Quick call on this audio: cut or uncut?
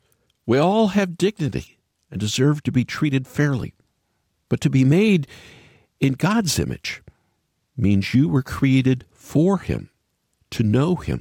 uncut